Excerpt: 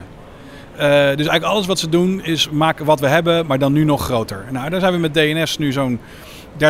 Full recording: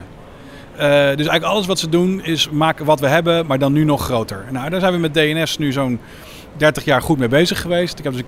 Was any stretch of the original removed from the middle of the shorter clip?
no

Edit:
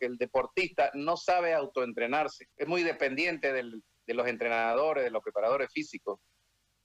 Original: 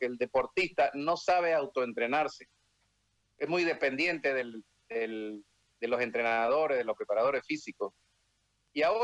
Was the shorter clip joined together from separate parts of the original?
yes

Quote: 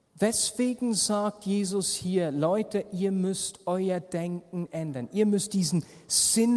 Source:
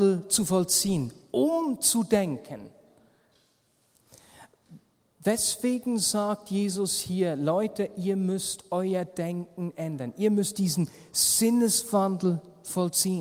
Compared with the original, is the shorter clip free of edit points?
yes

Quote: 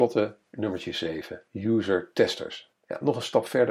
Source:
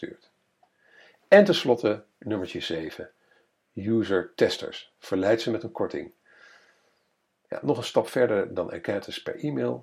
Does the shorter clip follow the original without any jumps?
no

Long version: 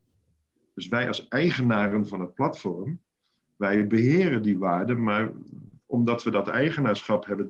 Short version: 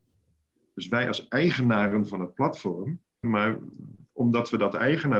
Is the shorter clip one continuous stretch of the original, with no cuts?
no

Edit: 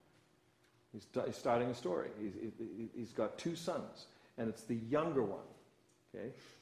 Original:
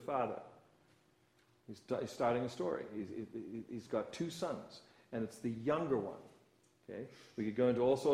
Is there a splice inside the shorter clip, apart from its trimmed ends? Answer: no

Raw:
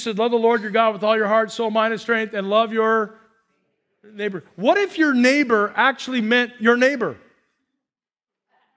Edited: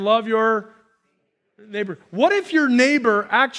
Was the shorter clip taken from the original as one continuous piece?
yes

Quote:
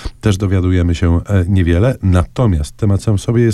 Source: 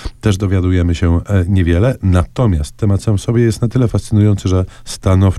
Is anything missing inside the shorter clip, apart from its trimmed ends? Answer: no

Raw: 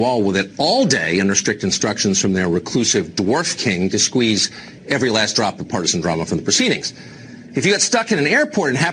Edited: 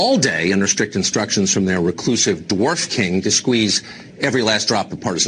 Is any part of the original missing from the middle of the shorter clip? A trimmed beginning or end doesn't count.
no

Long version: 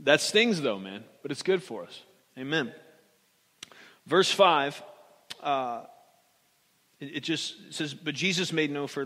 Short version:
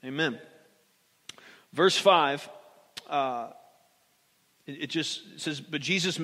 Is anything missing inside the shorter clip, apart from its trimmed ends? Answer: no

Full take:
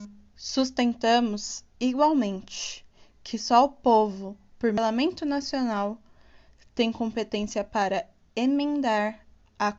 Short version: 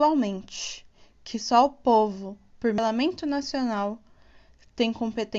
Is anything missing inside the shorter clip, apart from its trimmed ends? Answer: no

